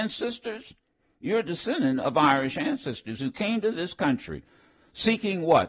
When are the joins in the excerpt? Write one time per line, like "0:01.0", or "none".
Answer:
none